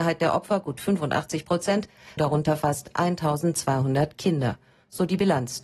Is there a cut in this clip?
yes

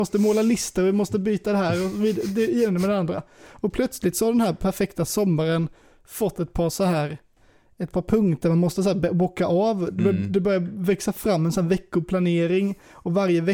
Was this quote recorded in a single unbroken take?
yes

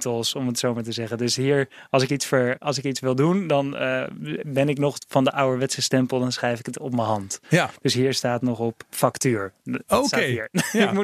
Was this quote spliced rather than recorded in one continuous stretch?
no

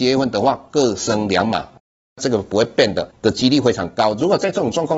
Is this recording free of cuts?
no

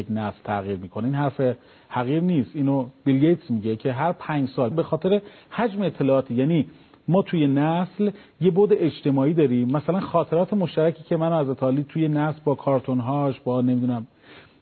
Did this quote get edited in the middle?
yes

